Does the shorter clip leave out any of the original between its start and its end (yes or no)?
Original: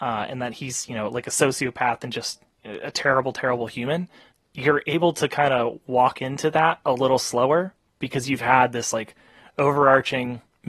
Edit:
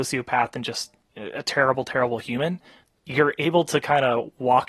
no